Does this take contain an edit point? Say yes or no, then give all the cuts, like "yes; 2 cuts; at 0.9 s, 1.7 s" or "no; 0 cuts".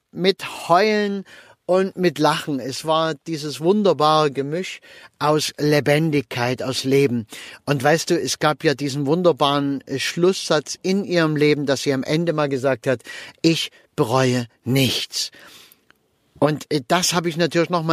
no; 0 cuts